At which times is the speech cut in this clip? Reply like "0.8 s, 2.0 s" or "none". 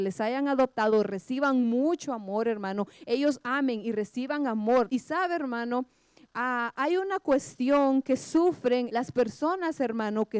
4.9 s, 8.9 s